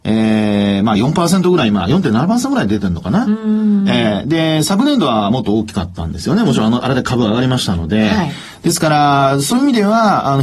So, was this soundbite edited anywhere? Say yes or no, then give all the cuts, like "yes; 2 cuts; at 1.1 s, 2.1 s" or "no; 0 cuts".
no; 0 cuts